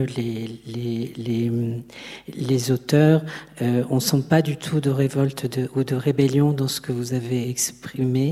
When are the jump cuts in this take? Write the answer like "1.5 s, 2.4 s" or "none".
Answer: none